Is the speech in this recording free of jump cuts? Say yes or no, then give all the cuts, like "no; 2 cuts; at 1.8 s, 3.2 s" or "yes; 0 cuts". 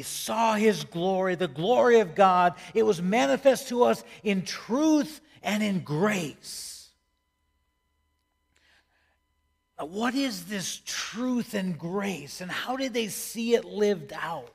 yes; 0 cuts